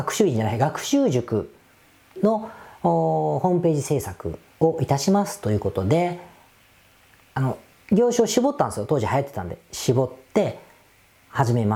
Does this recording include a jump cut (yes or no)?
no